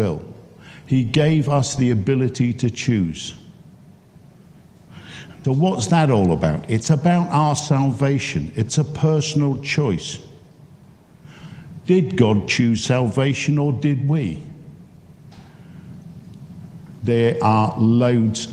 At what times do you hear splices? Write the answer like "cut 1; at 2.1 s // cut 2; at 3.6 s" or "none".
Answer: cut 1; at 5.4 s